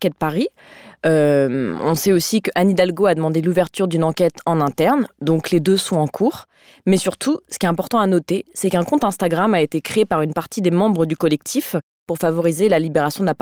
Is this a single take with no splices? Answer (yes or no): yes